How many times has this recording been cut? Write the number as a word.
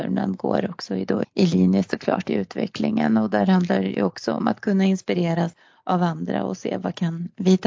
one